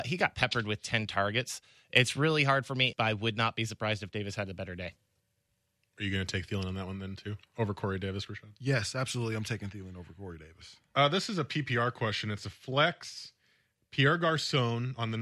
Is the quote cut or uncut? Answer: cut